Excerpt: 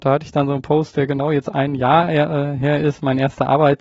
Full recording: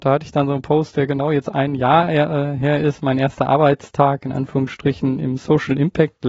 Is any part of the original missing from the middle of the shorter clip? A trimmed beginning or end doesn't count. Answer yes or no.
no